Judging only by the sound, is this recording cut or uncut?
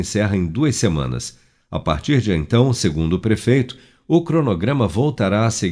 uncut